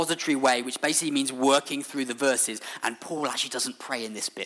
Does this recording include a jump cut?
no; 0 cuts

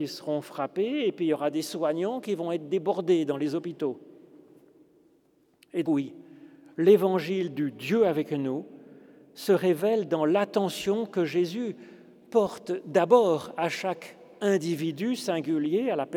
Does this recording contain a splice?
yes; 1 cut; at 5.8 s

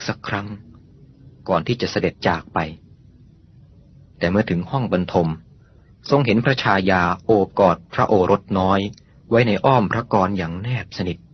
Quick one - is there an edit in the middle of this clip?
yes; 1 cut; at 2.1 s

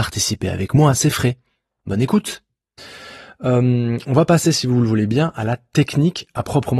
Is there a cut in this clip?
no; 0 cuts

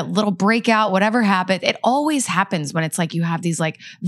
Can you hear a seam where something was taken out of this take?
no; 0 cuts

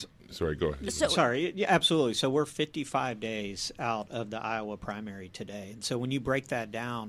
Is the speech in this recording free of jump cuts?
yes; 0 cuts

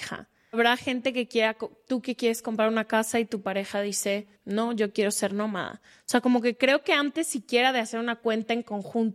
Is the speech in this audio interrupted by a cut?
yes; 1 cut; at 4.4 s

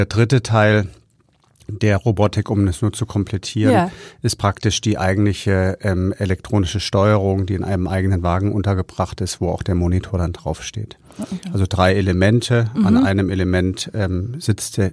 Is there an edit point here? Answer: no; 0 cuts

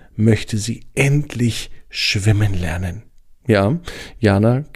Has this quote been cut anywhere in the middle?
no; 0 cuts

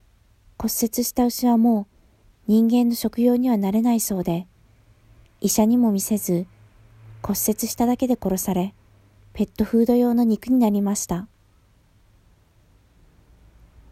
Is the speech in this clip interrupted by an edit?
no; 0 cuts

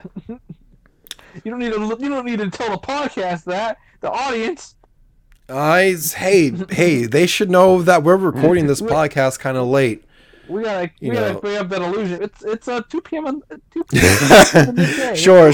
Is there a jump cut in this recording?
yes; 1 cut; at 12.2 s

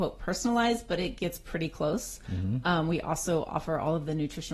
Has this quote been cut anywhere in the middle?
no; 0 cuts

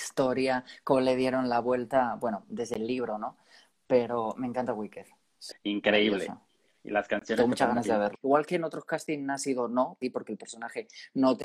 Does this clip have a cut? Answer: yes; 3 cuts; at 5.5 s, 8.1 s, 10.0 s

